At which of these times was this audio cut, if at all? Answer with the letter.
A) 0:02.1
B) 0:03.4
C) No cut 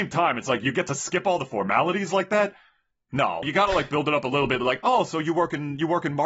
B